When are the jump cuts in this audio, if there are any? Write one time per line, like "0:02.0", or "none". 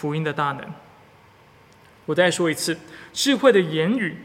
none